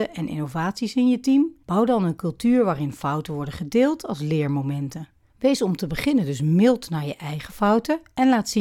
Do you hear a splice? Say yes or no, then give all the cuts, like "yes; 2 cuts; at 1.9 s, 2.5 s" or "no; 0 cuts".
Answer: yes; 1 cut; at 1.6 s